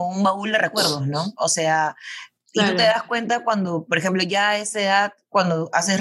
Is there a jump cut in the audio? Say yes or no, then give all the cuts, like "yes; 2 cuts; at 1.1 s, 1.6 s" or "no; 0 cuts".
no; 0 cuts